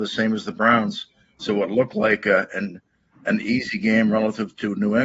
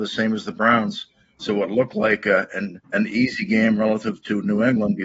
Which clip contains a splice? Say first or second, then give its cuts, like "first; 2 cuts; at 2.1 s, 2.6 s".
second; 1 cut; at 2.8 s